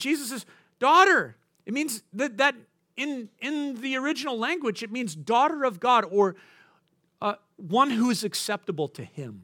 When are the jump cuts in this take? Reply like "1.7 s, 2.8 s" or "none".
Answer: none